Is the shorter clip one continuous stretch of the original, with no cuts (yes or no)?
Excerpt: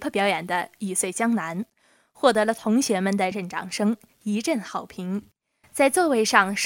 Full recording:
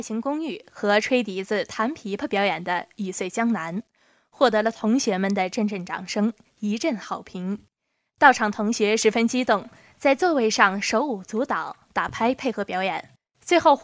no